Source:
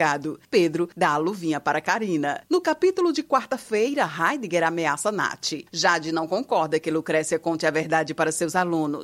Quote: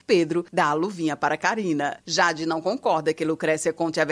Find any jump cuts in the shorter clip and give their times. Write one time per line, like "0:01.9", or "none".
0:02.0